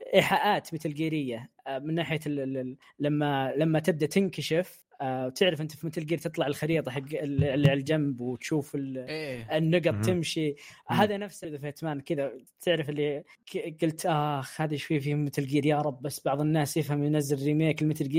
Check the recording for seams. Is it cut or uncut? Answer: uncut